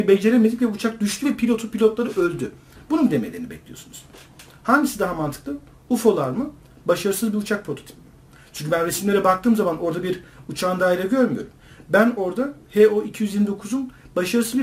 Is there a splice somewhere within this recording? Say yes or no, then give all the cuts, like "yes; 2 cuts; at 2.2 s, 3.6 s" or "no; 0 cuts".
no; 0 cuts